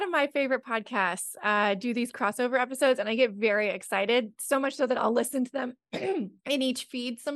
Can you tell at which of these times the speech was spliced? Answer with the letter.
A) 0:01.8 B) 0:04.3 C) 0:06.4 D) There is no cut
C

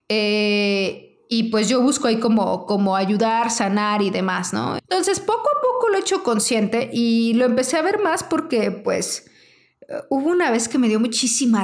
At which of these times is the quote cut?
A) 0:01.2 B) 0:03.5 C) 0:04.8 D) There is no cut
C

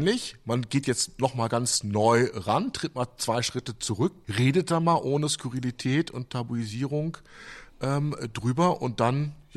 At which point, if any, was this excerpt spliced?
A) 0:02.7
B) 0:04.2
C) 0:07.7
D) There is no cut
B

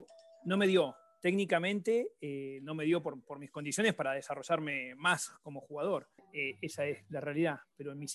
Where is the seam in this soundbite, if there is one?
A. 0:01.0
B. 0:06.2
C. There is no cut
B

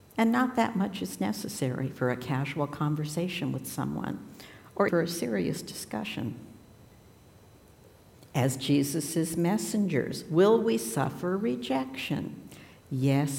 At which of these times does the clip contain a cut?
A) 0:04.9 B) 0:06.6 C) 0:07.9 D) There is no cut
A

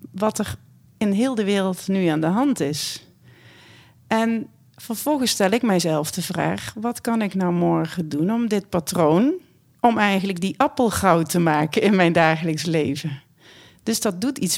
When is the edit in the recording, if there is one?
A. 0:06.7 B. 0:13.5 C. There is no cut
C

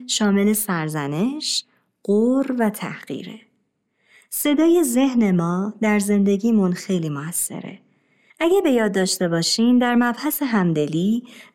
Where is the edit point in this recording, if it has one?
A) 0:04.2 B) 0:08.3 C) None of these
B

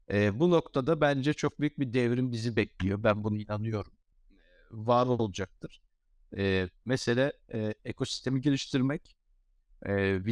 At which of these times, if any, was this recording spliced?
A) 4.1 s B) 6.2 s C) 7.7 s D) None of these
D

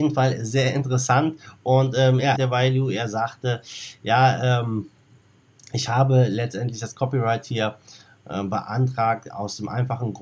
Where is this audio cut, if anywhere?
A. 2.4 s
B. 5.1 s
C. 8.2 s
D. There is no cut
A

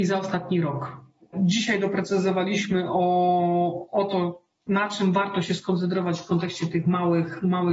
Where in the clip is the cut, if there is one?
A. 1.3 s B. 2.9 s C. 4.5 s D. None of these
A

